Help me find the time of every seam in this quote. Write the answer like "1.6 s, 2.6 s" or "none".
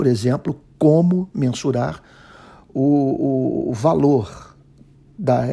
none